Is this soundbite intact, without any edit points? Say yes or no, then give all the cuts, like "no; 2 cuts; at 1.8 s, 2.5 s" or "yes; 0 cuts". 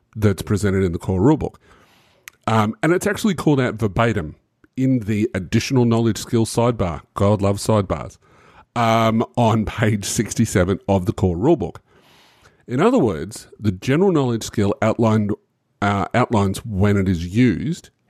yes; 0 cuts